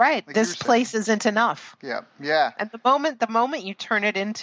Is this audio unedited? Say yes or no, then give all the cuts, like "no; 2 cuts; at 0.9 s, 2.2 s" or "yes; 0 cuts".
yes; 0 cuts